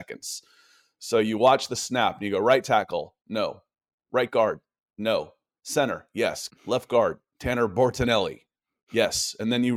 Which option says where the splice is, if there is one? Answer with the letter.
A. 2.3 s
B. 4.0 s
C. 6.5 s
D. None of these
C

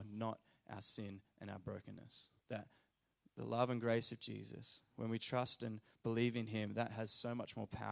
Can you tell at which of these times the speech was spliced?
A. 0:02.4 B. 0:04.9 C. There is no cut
A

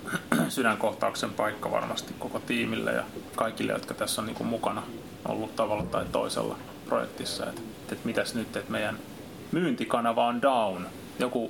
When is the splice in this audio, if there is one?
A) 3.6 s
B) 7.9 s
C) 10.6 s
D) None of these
B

